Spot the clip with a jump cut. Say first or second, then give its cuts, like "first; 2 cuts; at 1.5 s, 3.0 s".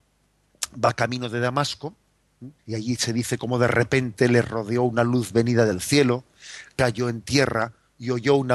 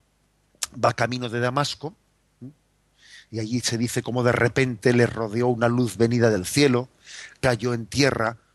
first; 1 cut; at 2.6 s